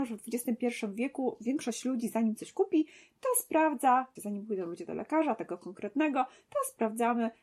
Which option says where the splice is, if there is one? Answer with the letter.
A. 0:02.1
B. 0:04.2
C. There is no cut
B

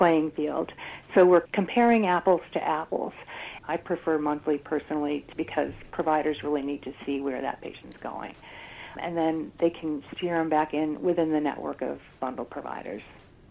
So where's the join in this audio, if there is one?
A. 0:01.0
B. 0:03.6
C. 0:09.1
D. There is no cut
B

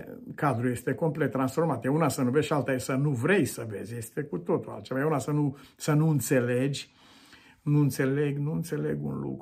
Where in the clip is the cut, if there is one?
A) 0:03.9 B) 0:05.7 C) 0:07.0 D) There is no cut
D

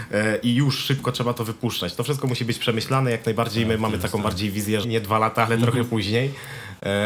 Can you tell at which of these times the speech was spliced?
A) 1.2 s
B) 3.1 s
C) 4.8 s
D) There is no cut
C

